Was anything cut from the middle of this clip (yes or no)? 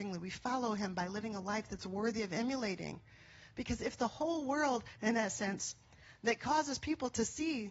yes